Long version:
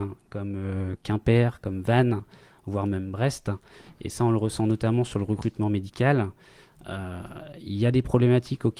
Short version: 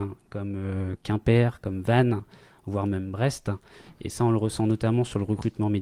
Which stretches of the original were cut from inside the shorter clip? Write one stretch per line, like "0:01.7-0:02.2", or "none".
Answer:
none